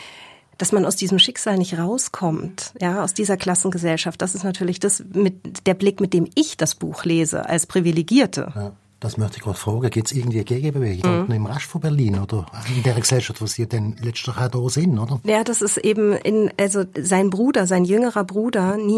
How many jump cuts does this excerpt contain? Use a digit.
1